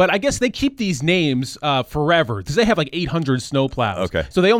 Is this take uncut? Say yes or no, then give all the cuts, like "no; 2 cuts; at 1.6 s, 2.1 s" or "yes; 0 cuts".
yes; 0 cuts